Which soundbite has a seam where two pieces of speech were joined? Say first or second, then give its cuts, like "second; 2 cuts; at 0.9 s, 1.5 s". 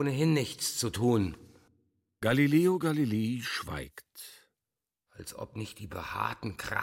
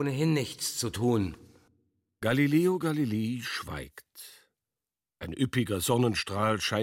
first; 1 cut; at 5.1 s